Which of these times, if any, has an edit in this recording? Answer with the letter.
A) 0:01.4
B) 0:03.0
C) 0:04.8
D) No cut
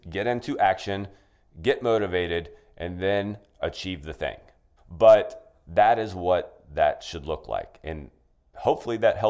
C